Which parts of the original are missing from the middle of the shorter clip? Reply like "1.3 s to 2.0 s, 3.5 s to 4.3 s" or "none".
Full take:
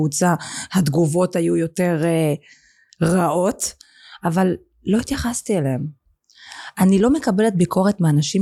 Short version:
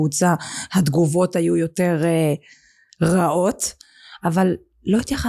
none

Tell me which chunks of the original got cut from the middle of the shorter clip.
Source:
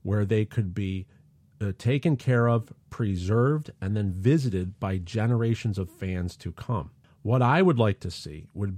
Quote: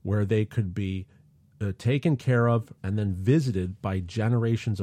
2.8 s to 3.8 s

